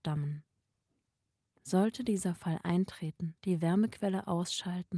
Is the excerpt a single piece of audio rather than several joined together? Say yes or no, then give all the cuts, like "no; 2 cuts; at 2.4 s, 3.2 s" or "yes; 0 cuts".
no; 2 cuts; at 1.5 s, 3.4 s